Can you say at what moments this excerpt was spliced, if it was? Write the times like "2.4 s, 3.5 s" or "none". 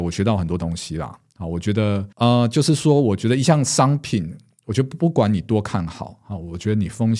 2.1 s

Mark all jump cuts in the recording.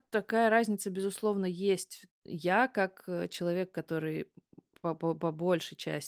none

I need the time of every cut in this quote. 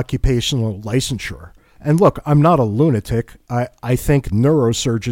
1.8 s

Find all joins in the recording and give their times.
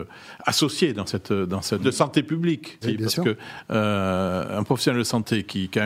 1.8 s, 2.8 s

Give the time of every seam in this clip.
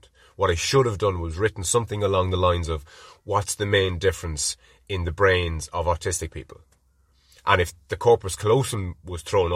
none

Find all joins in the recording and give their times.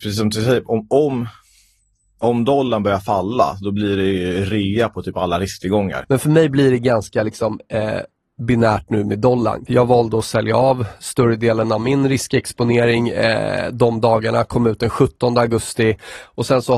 6.0 s, 9.7 s

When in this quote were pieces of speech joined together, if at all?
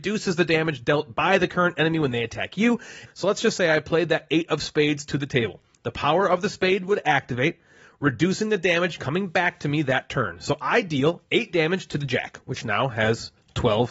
3.0 s

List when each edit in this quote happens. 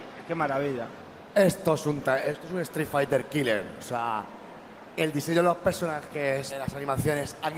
6.5 s

